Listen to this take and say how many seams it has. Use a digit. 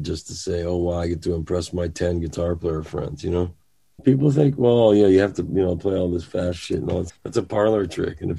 2